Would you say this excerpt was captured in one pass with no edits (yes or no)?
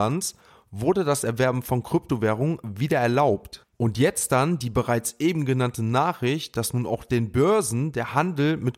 yes